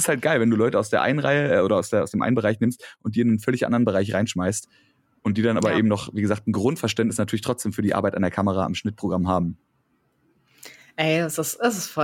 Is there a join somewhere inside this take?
no; 0 cuts

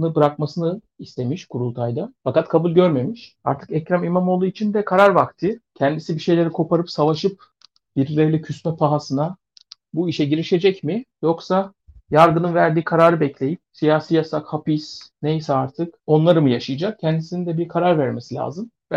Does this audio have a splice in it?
no; 0 cuts

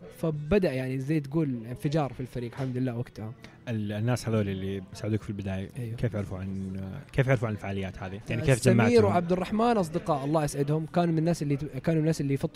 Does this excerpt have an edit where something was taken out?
yes; 1 cut; at 8.3 s

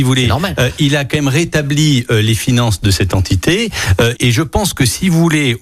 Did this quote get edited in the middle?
yes; 1 cut; at 4.2 s

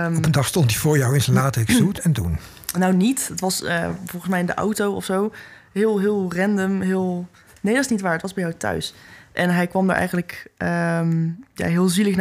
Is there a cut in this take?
no; 0 cuts

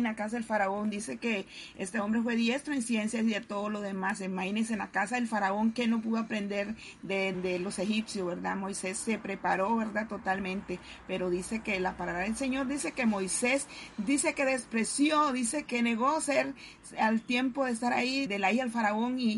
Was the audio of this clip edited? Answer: yes; 3 cuts; at 7.3 s, 15.7 s, 18.3 s

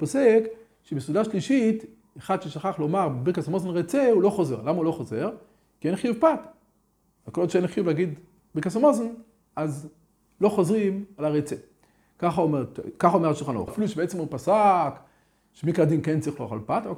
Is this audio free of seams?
no; 1 cut; at 13.7 s

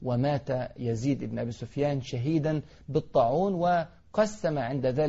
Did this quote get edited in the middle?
no; 0 cuts

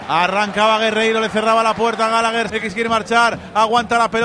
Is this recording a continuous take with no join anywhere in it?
no; 1 cut; at 2.5 s

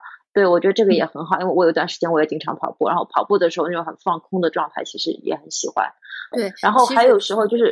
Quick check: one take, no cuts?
no; 1 cut; at 6.3 s

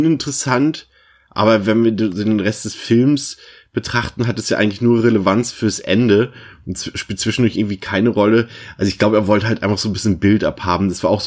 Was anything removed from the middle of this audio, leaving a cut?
no; 0 cuts

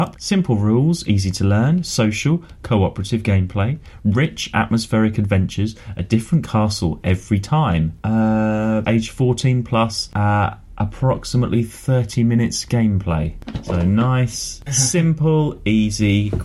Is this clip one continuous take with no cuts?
no; 1 cut; at 8.8 s

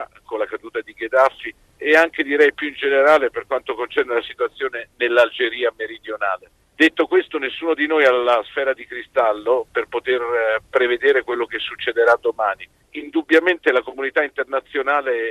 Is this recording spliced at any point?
no; 0 cuts

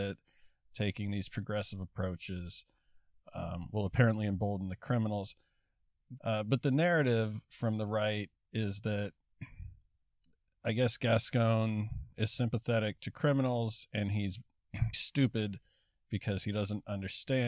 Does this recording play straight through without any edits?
no; 2 cuts; at 6.2 s, 14.9 s

